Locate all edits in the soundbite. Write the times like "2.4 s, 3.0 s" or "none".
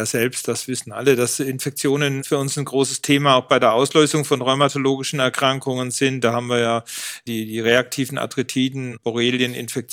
none